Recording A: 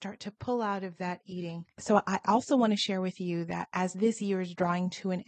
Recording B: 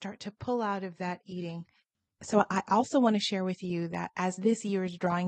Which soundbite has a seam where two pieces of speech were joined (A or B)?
A